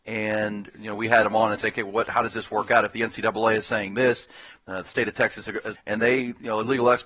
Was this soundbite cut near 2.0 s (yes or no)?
no